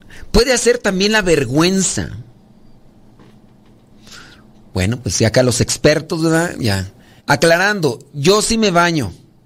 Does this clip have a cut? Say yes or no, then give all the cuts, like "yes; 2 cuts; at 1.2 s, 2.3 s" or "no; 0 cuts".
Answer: yes; 2 cuts; at 4.7 s, 7.2 s